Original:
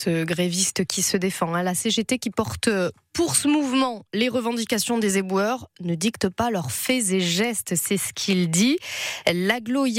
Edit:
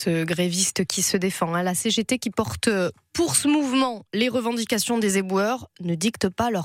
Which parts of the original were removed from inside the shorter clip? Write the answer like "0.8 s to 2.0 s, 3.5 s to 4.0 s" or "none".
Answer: none